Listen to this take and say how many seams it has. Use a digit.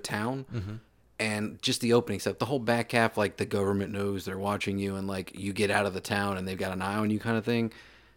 0